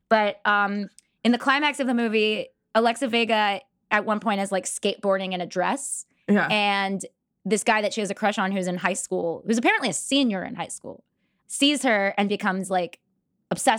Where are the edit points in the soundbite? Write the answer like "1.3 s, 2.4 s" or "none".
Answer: 11.4 s